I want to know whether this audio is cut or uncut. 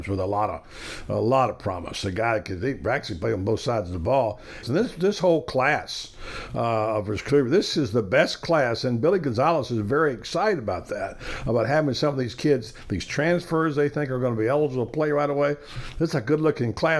cut